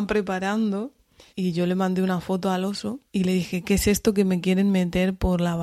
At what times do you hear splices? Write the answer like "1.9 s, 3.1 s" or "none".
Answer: 1.3 s, 3.1 s